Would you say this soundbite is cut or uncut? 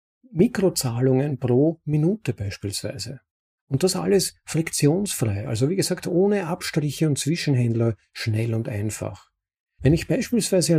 uncut